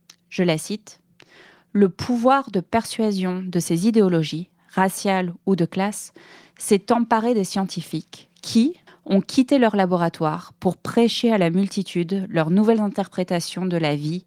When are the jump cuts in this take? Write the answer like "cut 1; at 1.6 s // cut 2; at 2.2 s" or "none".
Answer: cut 1; at 8.9 s